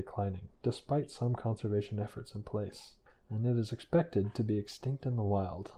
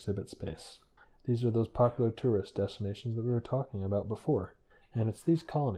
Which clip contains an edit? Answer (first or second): second